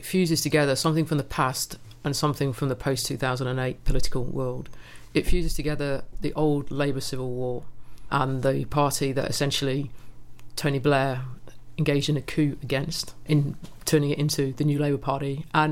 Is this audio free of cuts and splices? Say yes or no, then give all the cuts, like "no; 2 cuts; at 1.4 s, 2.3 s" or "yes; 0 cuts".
yes; 0 cuts